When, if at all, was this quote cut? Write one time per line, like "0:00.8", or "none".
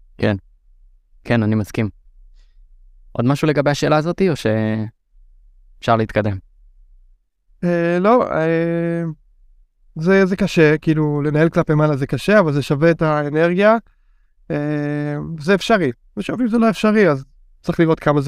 none